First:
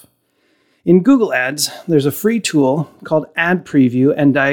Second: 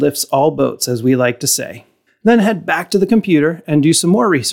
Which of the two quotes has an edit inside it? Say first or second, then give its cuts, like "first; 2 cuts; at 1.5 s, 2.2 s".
second; 1 cut; at 2.1 s